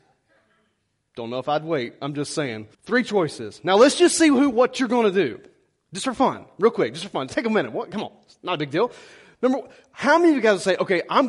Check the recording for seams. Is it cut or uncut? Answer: cut